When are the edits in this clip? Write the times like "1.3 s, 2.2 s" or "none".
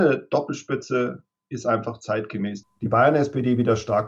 2.6 s